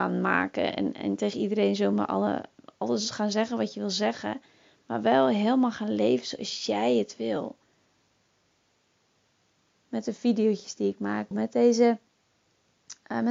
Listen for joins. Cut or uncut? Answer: cut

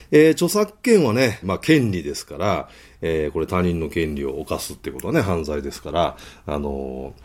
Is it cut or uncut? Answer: cut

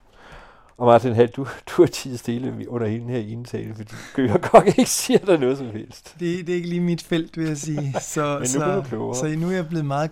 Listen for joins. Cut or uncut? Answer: uncut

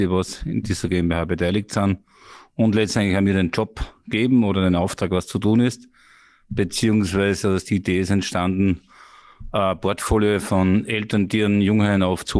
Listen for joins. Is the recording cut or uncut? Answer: uncut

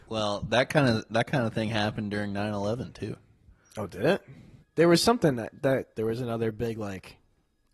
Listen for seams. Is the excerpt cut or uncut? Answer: cut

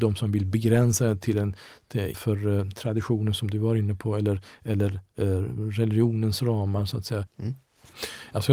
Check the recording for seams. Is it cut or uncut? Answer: cut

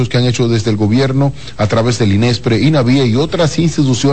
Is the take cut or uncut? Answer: uncut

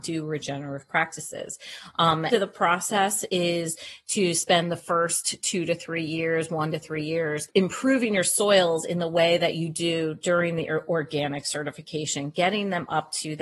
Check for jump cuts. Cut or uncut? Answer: cut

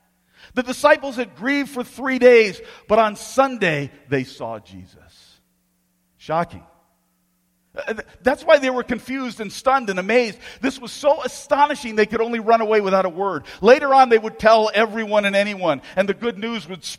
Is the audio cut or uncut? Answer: uncut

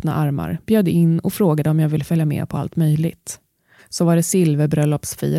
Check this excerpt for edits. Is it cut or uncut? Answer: cut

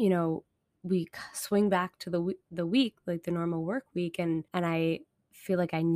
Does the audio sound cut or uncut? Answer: cut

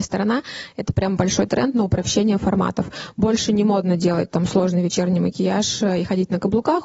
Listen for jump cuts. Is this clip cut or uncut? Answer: uncut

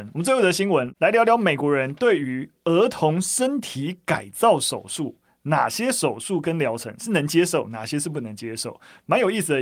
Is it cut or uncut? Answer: uncut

